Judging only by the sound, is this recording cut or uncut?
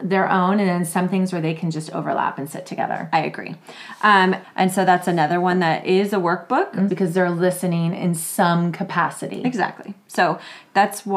cut